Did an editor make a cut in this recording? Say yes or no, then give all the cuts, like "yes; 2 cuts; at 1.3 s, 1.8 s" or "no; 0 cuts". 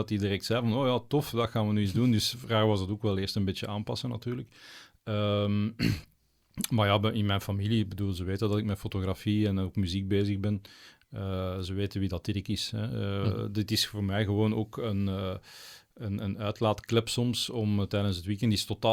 no; 0 cuts